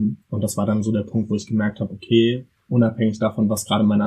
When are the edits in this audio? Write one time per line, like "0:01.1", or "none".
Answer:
0:02.7